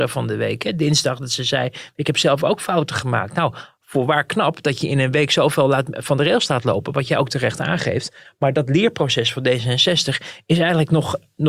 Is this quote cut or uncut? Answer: uncut